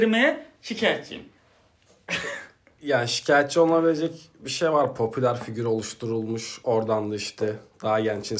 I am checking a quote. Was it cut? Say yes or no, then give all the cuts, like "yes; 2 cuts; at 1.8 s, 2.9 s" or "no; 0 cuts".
yes; 1 cut; at 1.4 s